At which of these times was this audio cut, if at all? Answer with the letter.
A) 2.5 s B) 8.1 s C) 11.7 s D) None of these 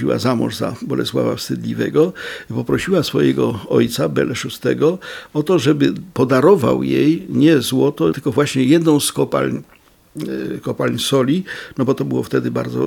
B